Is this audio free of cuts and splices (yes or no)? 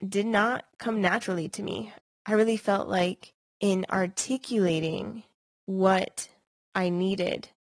yes